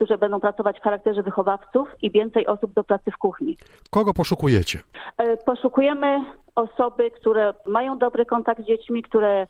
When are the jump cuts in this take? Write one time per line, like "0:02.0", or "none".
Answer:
none